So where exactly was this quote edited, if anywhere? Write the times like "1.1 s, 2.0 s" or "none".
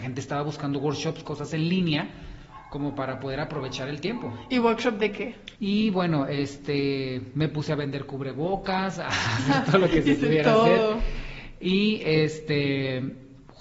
5.6 s